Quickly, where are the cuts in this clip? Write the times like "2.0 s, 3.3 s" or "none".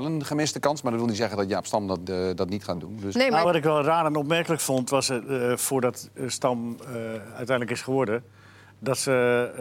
none